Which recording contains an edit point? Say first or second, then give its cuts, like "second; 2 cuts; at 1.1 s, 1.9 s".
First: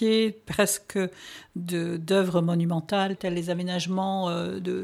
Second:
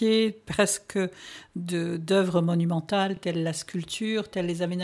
first; 1 cut; at 3.2 s